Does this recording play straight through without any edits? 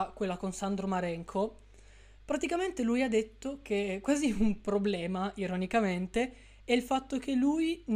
yes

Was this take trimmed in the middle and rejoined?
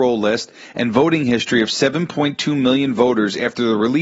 no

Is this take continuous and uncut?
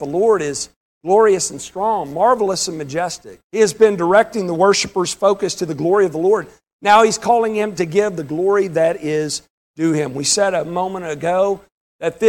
no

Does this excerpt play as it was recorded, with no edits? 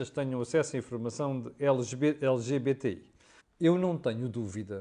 no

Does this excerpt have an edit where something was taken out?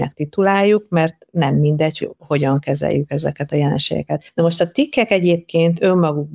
yes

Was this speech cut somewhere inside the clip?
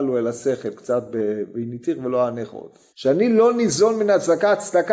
yes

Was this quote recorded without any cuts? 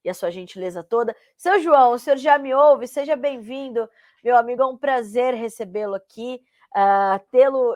yes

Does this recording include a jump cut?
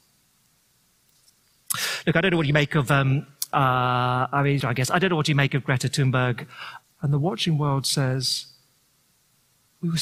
yes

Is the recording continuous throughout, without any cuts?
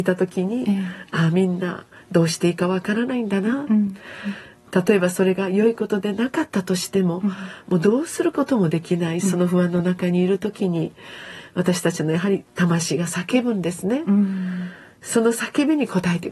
yes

